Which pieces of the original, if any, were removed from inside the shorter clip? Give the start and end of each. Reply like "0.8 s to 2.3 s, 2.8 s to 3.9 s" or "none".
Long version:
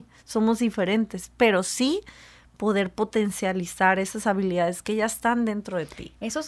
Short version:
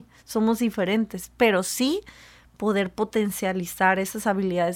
none